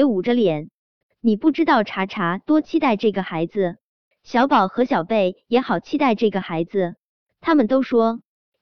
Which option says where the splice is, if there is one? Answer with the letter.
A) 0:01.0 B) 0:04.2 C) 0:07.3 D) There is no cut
A